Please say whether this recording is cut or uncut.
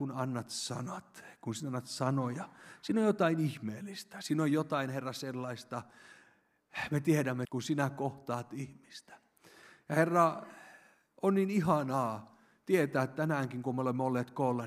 cut